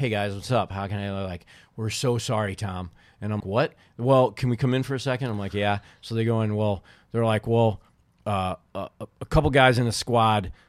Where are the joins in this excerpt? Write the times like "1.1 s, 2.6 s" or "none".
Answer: 3.4 s